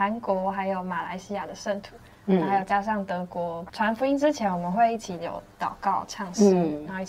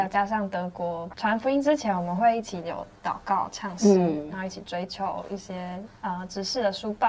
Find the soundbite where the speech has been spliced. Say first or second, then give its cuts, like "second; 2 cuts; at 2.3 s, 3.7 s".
second; 1 cut; at 5.9 s